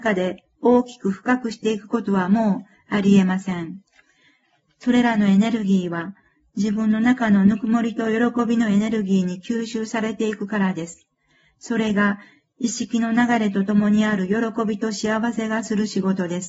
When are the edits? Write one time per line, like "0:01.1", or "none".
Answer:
none